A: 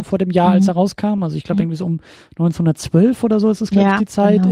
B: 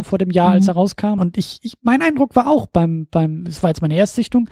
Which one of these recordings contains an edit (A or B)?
B